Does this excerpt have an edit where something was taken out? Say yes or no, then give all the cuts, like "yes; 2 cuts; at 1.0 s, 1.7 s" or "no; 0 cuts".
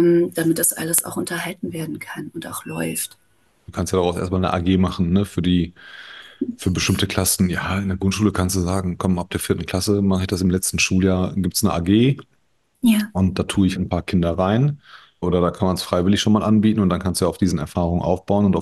yes; 3 cuts; at 3.7 s, 13.7 s, 15.2 s